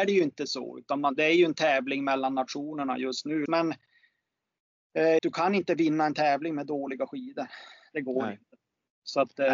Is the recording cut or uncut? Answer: cut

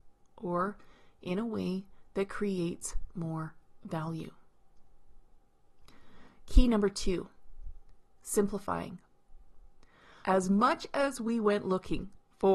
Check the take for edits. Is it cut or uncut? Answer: cut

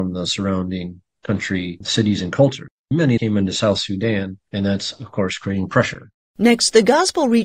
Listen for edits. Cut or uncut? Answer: uncut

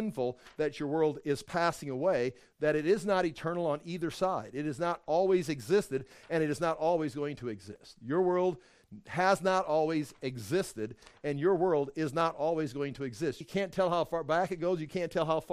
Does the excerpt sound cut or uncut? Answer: cut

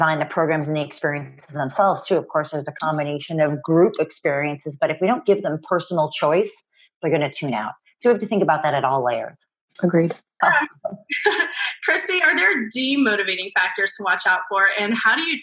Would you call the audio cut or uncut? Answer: cut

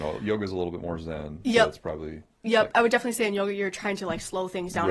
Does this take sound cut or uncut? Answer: cut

